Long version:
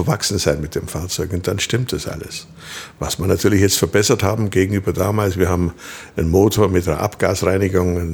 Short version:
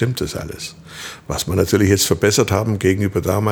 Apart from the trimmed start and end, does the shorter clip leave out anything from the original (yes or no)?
no